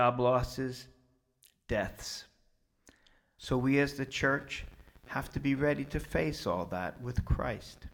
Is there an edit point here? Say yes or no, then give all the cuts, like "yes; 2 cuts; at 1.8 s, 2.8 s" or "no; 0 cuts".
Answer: yes; 1 cut; at 3.4 s